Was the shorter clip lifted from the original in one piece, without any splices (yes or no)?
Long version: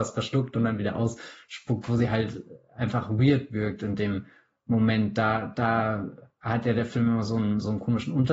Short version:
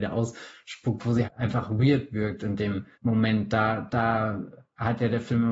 no